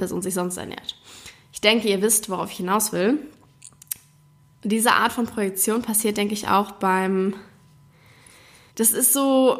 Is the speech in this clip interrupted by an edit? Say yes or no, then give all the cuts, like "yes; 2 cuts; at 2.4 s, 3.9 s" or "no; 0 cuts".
yes; 1 cut; at 8.7 s